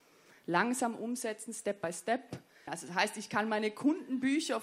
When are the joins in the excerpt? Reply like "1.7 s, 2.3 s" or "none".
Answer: 2.7 s

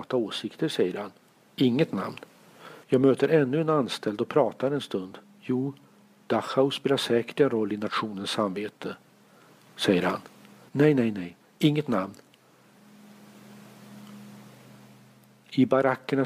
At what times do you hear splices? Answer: 2.8 s, 10.7 s

